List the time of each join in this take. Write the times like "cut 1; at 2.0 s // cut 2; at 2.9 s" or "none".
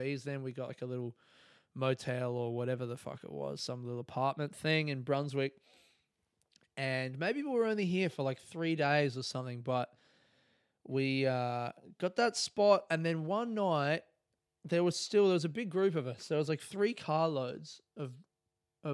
none